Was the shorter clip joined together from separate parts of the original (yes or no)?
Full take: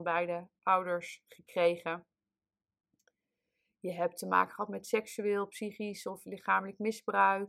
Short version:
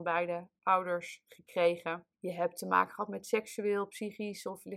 yes